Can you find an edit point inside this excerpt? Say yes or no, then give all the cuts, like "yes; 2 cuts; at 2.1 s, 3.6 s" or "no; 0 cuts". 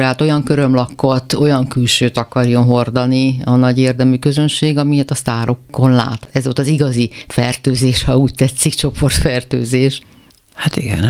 no; 0 cuts